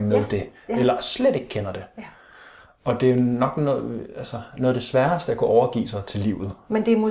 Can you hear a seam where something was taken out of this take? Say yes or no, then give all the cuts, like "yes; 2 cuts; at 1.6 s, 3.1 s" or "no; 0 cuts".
no; 0 cuts